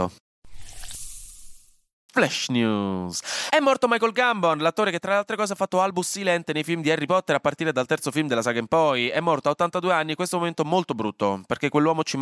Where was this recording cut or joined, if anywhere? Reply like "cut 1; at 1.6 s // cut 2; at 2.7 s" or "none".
cut 1; at 2.1 s